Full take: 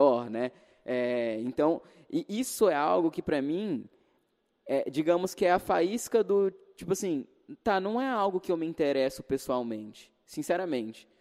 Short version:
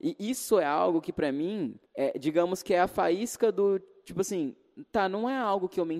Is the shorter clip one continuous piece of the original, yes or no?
no